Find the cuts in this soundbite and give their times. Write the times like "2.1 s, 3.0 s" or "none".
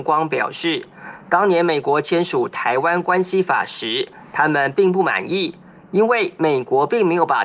none